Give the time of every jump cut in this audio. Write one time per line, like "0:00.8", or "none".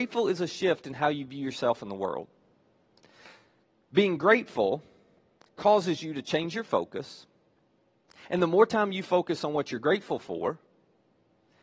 none